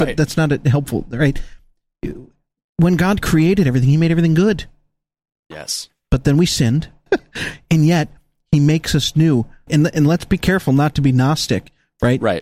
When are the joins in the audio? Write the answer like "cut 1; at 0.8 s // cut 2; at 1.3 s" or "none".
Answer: cut 1; at 7.1 s // cut 2; at 9.7 s